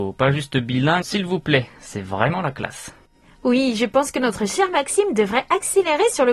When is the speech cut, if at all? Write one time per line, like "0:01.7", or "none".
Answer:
0:01.0